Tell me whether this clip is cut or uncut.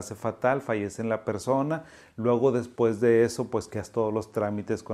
uncut